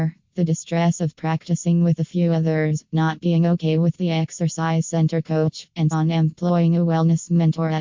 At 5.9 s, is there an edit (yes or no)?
yes